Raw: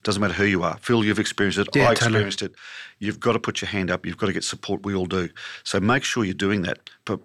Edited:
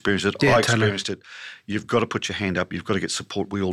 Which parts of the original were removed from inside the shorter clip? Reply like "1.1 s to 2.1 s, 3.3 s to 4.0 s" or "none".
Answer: none